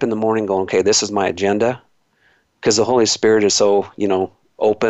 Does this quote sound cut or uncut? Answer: uncut